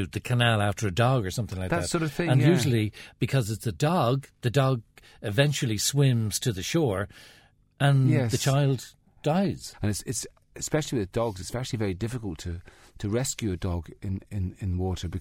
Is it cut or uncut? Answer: cut